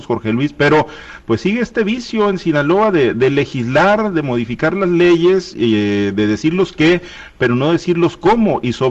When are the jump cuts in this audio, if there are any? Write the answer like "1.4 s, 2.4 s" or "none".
none